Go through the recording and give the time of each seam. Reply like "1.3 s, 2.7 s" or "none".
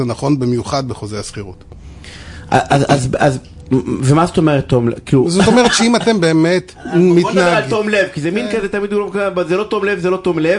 none